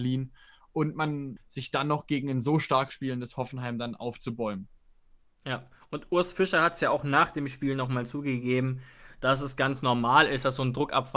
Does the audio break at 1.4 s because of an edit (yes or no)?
yes